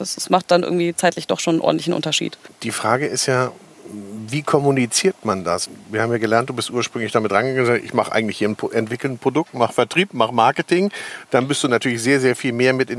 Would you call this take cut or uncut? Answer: uncut